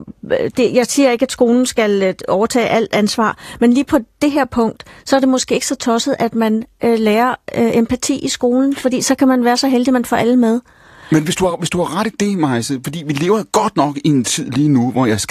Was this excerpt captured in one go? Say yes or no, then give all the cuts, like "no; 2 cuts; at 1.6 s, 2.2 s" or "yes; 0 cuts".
yes; 0 cuts